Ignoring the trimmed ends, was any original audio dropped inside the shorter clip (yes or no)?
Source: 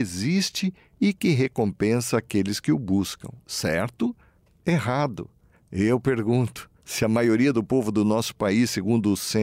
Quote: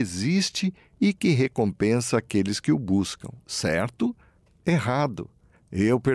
no